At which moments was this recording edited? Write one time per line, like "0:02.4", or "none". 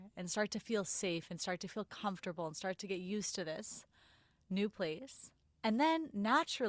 none